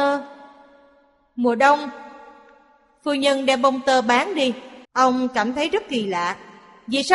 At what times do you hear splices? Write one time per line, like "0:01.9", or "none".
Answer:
0:04.8

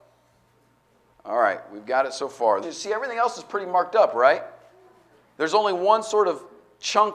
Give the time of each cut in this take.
0:01.1
0:02.6

